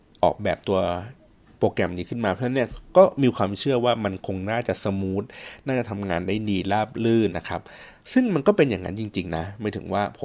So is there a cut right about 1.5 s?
no; 1 cut; at 7.3 s

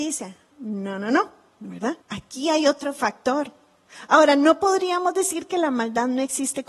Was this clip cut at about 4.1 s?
no; 1 cut; at 2.0 s

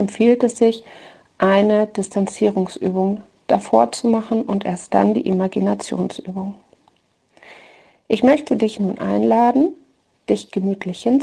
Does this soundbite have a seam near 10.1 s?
no; 0 cuts

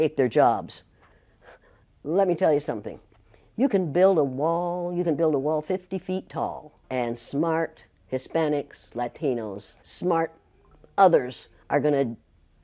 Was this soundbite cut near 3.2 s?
no; 2 cuts; at 6.8 s, 9.8 s

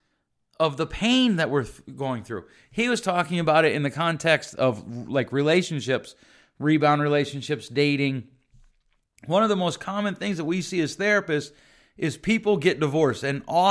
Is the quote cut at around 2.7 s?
no; 0 cuts

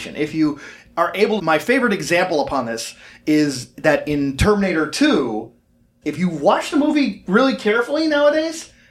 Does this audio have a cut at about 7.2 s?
no; 2 cuts; at 1.4 s, 6.0 s

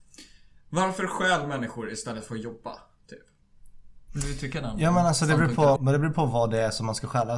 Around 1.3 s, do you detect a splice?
no; 2 cuts; at 4.1 s, 5.8 s

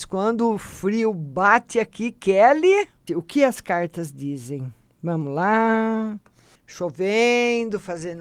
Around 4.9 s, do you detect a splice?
no; 2 cuts; at 3.1 s, 6.6 s

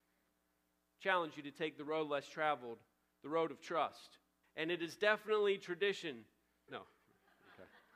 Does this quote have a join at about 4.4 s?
yes; 2 cuts; at 4.4 s, 6.7 s

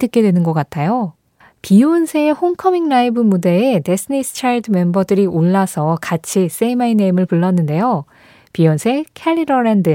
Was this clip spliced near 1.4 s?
yes; 1 cut; at 1.4 s

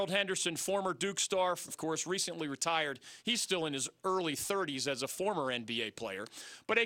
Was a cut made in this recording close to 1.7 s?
yes; 1 cut; at 1.7 s

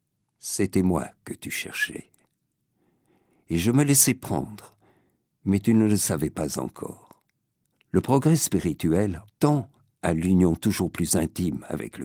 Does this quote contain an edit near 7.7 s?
yes; 2 cuts; at 7.7 s, 9.3 s

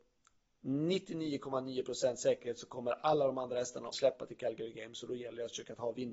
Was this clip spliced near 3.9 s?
yes; 1 cut; at 3.9 s

